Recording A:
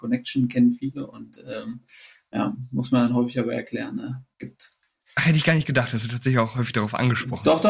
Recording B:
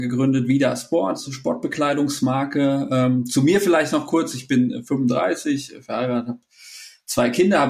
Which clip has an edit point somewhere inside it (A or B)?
A